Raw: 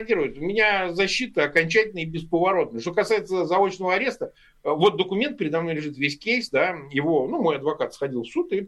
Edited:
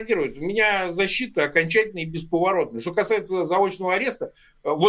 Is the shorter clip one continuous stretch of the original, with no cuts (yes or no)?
yes